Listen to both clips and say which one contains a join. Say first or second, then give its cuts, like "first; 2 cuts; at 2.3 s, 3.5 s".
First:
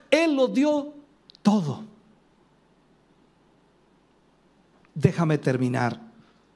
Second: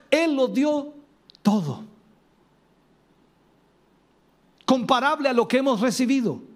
second; 1 cut; at 4.4 s